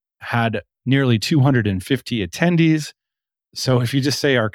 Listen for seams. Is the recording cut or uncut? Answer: uncut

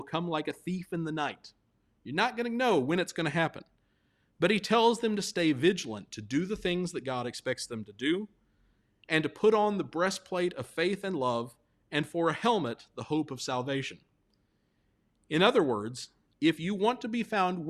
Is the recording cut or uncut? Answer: uncut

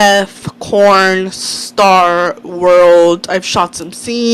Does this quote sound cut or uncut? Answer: uncut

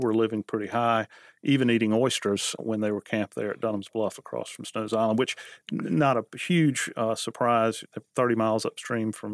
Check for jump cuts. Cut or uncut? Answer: cut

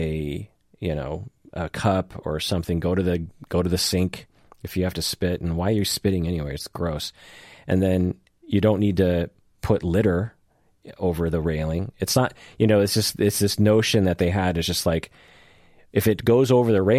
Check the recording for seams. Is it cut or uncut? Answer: uncut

